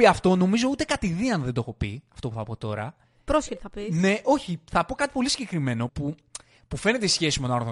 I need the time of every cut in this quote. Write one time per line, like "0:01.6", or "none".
0:05.9